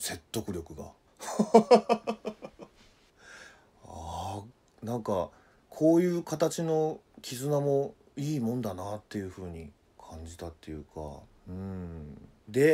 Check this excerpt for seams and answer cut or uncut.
uncut